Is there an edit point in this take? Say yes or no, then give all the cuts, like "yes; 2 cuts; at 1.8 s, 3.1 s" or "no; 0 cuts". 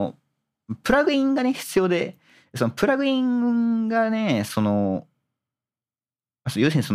no; 0 cuts